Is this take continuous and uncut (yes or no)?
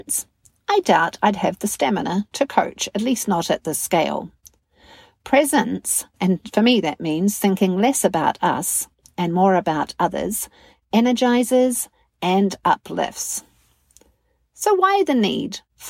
no